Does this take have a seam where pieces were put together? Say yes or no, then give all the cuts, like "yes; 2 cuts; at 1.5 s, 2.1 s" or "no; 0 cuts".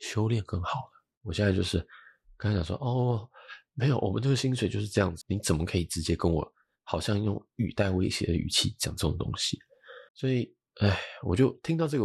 yes; 2 cuts; at 5.2 s, 10.1 s